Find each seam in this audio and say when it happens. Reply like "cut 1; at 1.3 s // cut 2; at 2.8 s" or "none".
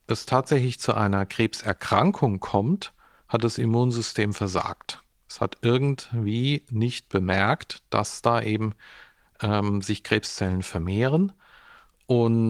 none